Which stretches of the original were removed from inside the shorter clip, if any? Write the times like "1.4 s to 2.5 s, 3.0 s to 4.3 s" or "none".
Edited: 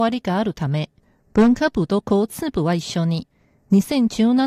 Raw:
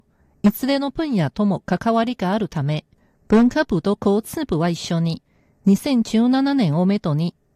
none